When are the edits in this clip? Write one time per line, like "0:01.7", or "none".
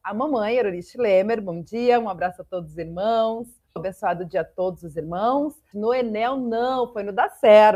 0:03.8
0:05.7